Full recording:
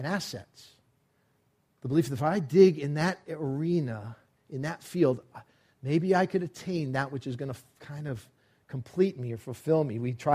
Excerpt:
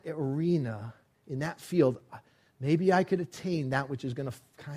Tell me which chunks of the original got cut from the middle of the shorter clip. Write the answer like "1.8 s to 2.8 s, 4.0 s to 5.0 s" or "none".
none